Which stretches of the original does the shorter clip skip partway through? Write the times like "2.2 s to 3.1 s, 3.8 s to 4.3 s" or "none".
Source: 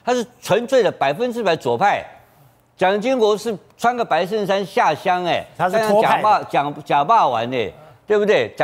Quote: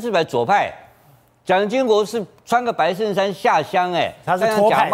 none